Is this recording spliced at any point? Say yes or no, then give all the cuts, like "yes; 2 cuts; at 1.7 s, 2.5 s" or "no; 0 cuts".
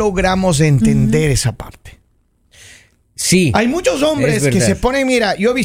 no; 0 cuts